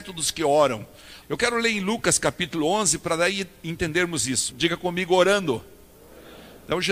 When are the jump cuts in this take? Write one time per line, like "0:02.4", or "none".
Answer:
0:01.2
0:04.5